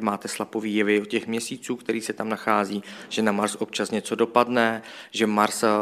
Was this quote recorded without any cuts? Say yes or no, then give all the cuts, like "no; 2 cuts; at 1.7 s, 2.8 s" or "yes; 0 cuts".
yes; 0 cuts